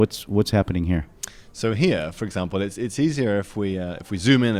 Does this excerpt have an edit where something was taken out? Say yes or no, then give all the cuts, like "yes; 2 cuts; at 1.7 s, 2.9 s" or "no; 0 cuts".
no; 0 cuts